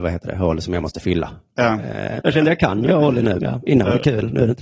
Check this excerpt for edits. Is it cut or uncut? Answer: cut